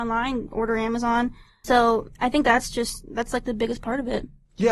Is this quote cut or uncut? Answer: uncut